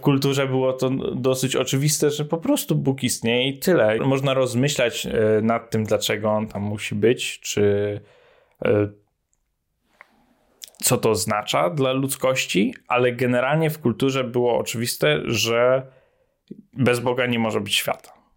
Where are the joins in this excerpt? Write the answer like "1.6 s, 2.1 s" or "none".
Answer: 4.0 s

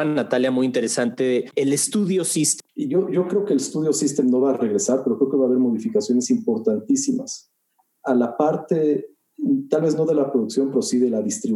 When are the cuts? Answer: 2.7 s

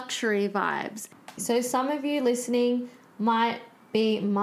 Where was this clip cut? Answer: 1.4 s

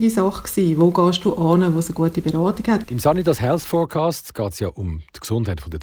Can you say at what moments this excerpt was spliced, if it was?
2.8 s

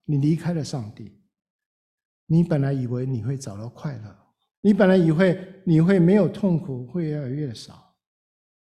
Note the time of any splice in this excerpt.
2.0 s, 4.5 s

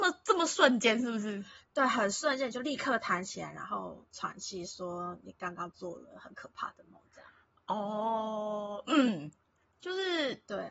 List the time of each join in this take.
none

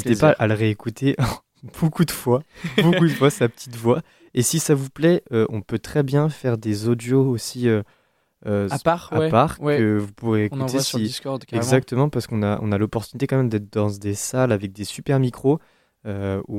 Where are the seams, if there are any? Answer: none

